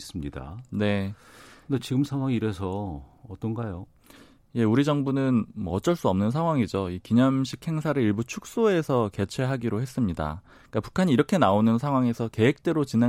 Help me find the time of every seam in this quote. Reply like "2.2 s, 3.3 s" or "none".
none